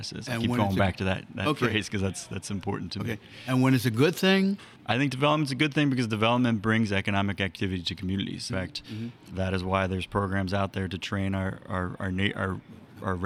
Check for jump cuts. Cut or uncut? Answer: cut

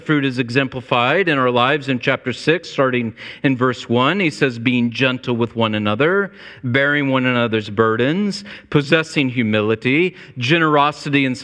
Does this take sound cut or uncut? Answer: uncut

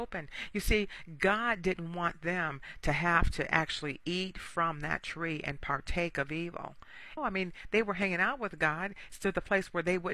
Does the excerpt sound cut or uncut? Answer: cut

